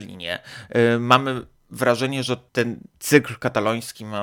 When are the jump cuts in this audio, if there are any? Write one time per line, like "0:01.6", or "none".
none